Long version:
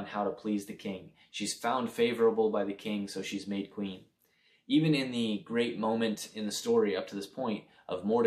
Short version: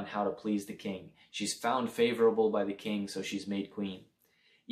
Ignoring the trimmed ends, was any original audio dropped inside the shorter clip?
no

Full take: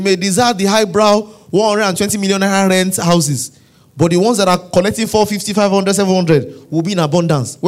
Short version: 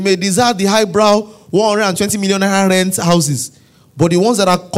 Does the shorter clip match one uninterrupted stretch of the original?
yes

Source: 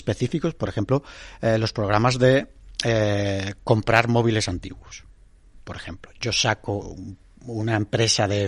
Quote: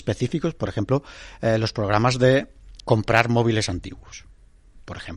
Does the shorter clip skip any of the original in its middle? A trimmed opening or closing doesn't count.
yes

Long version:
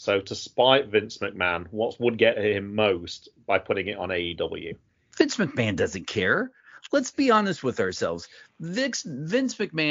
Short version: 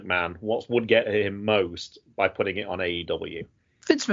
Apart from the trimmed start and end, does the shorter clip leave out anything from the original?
no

